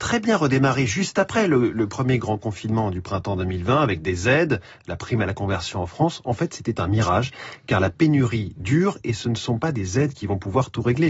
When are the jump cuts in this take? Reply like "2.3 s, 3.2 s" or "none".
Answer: none